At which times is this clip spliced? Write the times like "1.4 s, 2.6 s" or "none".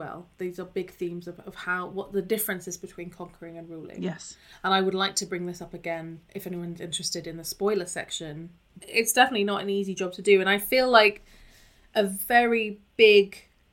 6.3 s, 8.8 s